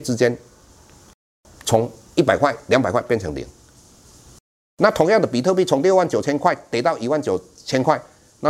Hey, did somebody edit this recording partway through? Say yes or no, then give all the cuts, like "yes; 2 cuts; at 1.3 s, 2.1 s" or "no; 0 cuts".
no; 0 cuts